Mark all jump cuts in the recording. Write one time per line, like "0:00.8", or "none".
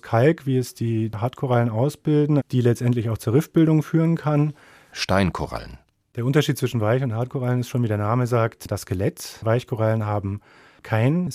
0:02.4
0:04.9